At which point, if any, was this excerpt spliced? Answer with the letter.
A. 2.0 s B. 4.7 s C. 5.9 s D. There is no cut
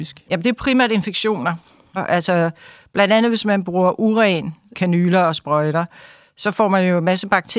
A